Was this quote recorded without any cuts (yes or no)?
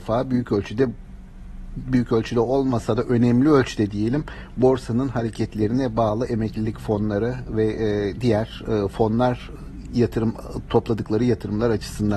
yes